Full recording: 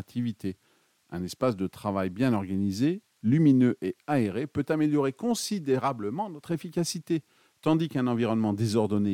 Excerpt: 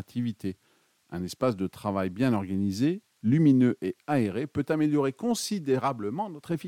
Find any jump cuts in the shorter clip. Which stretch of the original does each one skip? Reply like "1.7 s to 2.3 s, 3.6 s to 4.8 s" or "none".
none